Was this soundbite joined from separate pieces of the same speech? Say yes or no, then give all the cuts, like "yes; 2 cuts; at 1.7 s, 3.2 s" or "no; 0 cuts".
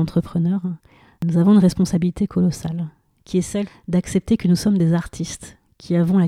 yes; 1 cut; at 3.7 s